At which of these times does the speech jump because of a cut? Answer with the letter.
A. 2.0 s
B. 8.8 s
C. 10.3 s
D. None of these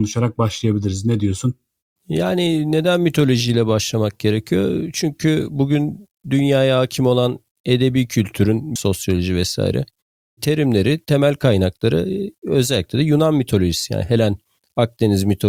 B